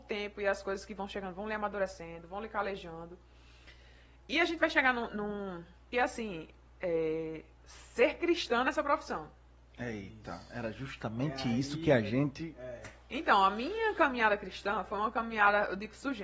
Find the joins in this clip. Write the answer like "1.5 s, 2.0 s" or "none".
5.9 s

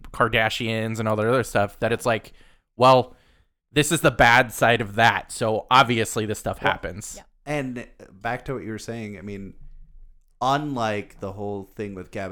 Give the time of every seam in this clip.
none

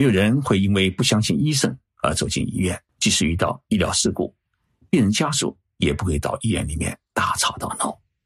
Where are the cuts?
2.9 s

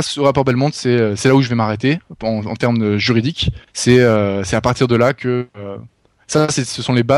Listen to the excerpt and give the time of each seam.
3.7 s

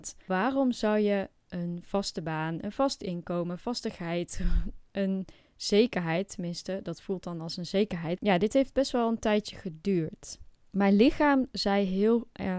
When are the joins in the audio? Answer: 8.2 s

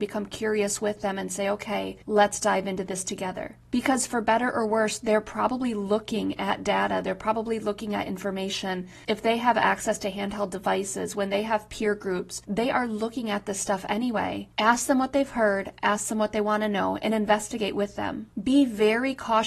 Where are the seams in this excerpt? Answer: none

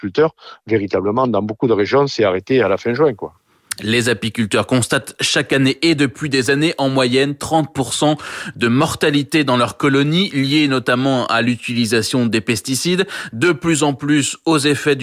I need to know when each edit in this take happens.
none

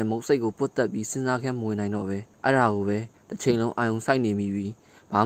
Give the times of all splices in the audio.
2.3 s

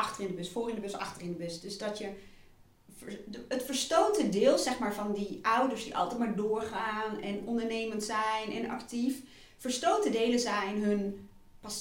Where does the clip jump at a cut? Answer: none

